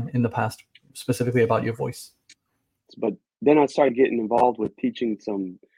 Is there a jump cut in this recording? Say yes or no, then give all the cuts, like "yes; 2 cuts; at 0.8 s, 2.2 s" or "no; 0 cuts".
yes; 1 cut; at 2.9 s